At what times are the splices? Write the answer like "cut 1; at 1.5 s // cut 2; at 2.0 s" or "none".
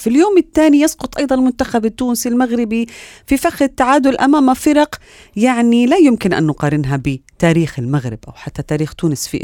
none

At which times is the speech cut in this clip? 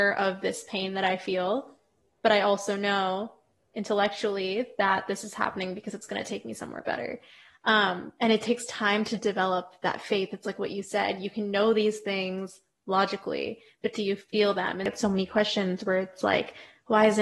none

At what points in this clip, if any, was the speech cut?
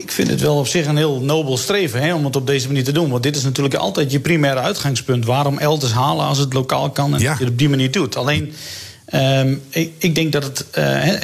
none

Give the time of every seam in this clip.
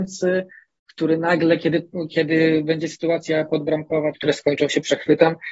cut 1; at 4.1 s

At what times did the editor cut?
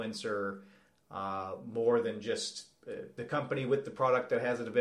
cut 1; at 3.2 s

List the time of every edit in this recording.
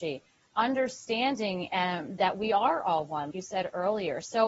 cut 1; at 3.3 s

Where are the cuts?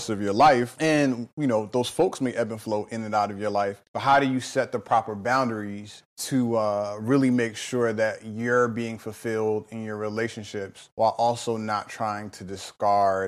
cut 1; at 3.9 s

